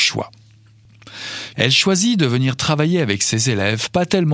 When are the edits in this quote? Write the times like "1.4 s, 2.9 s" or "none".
1.5 s